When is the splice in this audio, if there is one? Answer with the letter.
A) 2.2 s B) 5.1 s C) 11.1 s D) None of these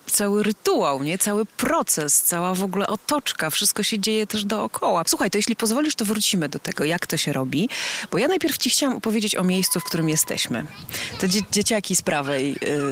B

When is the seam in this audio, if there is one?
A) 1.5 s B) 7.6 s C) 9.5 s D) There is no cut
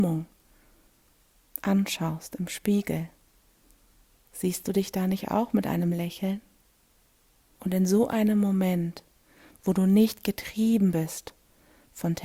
B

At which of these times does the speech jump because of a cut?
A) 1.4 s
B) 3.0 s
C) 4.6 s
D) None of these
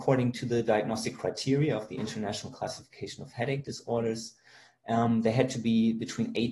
D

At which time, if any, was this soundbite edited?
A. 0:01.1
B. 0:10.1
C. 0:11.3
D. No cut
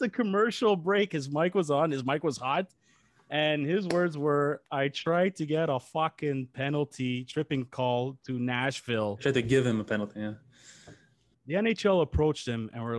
C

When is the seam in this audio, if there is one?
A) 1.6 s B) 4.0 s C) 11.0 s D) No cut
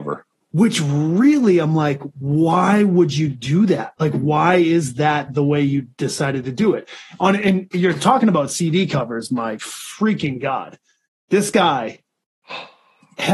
D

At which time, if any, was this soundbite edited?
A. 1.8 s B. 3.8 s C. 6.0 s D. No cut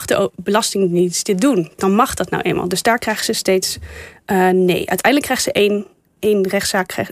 A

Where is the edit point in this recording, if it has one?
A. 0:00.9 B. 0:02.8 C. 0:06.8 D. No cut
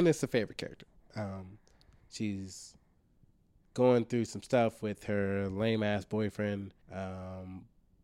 C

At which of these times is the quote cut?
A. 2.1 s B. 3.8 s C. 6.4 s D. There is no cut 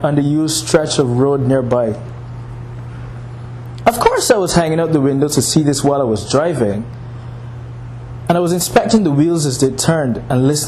B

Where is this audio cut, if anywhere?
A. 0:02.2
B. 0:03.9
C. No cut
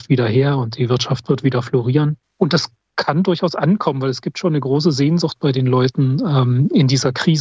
A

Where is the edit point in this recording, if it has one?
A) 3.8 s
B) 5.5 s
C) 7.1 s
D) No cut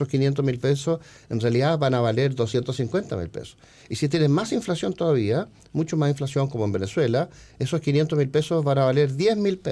D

